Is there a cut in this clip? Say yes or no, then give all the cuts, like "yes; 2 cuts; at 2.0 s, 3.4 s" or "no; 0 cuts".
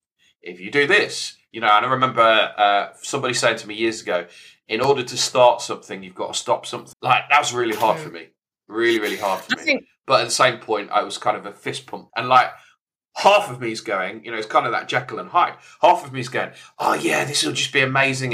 yes; 2 cuts; at 6.9 s, 12.1 s